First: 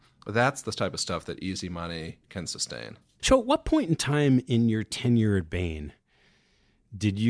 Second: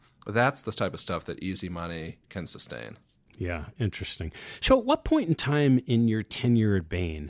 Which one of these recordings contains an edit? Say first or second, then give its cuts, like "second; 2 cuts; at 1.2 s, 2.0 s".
first; 1 cut; at 3.2 s